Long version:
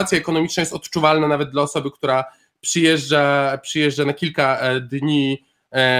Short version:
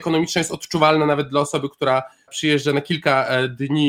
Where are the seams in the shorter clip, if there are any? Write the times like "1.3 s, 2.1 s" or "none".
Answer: 2.3 s